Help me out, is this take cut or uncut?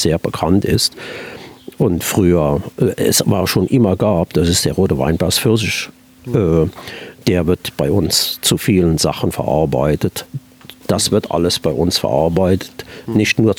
cut